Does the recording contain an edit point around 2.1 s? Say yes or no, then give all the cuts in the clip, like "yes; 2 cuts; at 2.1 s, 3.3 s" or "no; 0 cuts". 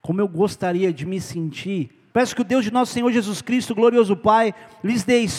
yes; 1 cut; at 2.1 s